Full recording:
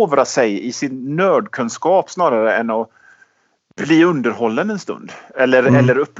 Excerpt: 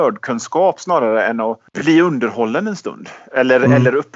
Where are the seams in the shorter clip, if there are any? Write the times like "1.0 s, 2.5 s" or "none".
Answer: 1.7 s